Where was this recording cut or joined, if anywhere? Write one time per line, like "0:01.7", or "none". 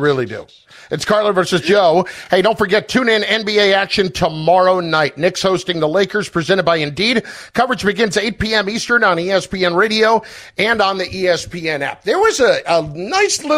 none